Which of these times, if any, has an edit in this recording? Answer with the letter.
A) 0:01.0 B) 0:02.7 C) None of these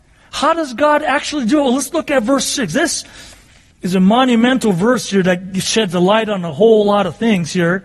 C